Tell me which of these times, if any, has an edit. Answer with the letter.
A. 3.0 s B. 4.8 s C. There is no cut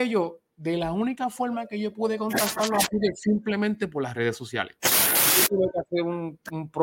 C